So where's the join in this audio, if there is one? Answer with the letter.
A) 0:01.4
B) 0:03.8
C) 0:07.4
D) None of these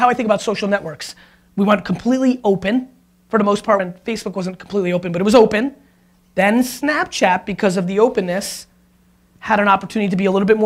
B